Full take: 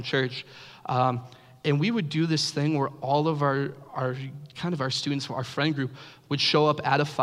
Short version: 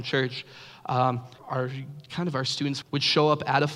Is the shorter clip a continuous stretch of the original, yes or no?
no